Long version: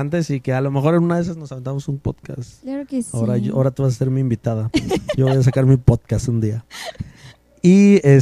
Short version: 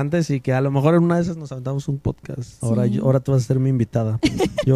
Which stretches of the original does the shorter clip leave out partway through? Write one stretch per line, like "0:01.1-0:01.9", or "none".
0:02.6-0:03.1

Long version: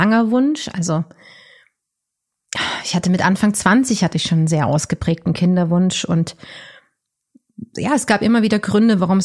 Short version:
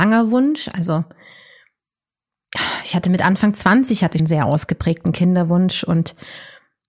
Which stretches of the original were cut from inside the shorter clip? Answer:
0:04.2-0:04.4

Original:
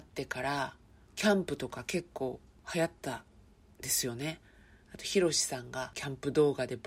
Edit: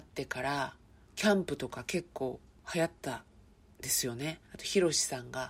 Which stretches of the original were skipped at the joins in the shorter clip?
0:04.4-0:04.8

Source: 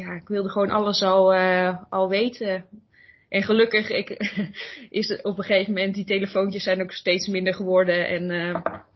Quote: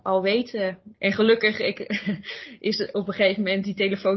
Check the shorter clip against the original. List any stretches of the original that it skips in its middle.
0:02.8-0:03.2

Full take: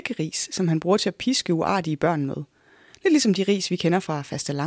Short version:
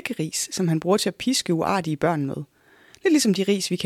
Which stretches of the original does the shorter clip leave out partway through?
none

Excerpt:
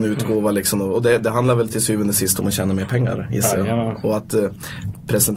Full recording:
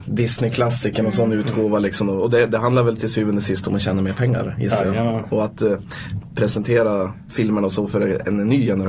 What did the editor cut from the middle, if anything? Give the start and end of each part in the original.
none

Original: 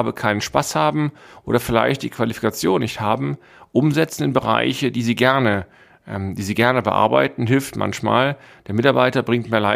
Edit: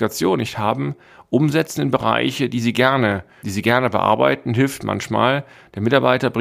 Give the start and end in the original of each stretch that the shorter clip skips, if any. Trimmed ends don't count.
0:05.9-0:06.4

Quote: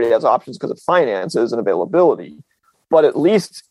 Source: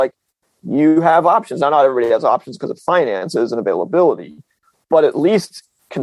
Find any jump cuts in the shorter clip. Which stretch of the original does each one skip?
none

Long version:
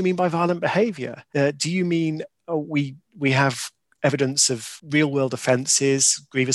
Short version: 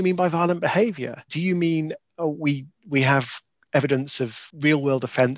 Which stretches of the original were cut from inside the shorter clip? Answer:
0:01.3-0:01.6

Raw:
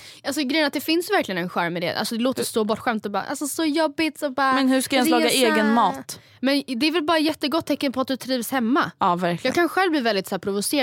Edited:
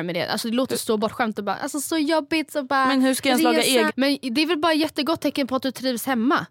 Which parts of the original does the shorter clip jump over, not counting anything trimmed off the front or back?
0:05.5-0:06.3

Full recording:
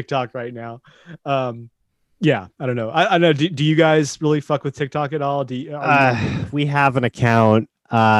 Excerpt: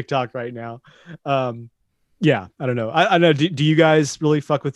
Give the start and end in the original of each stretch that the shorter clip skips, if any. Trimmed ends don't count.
none

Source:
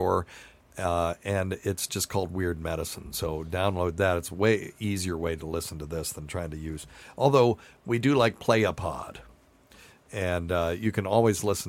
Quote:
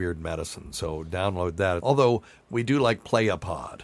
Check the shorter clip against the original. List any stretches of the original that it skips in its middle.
0:04.2-0:07.1

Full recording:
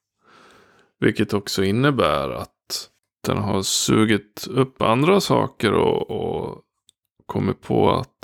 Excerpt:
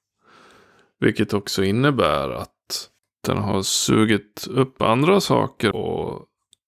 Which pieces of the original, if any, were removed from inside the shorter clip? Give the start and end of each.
0:05.7-0:06.1

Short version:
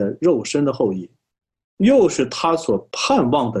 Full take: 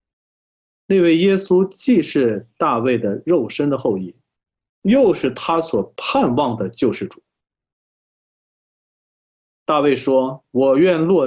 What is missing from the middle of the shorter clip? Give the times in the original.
none

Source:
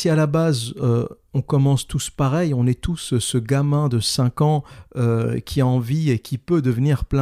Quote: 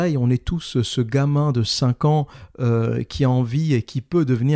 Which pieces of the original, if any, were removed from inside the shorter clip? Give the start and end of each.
none

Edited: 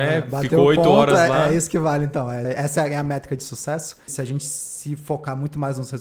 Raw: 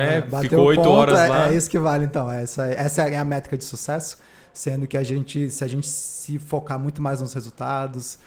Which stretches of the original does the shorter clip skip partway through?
0:02.4-0:02.7
0:04.3-0:05.5

